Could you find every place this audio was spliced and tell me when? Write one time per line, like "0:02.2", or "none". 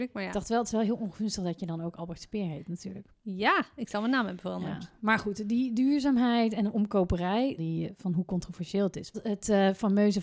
0:07.6
0:09.1

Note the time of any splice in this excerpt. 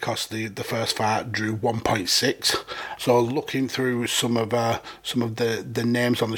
0:03.0

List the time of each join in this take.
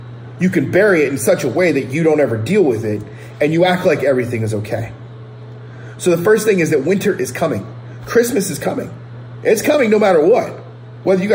none

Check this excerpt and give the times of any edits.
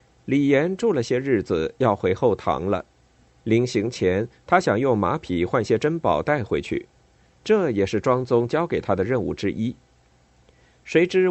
none

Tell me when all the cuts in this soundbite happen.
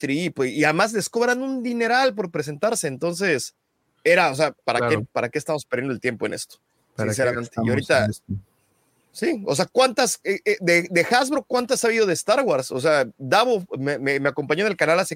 0:04.6

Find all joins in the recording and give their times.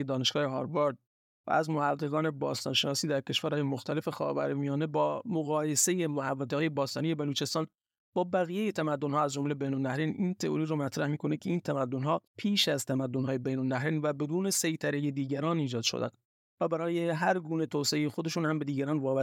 0:12.3

